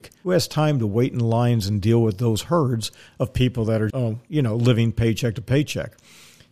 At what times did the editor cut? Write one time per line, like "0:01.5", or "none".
0:03.9

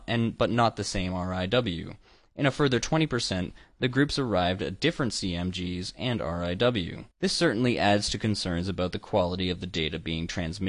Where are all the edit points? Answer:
0:07.1

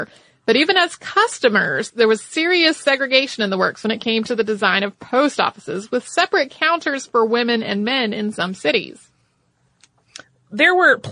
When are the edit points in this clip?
0:01.9

